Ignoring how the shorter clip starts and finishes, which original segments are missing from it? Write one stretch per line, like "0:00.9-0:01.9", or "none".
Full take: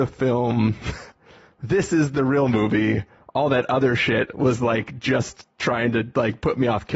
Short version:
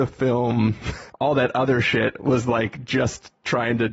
0:01.1-0:03.2